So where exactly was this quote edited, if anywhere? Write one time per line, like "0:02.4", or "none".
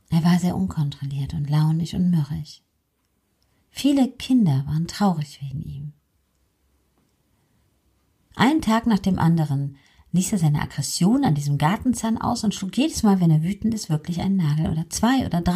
none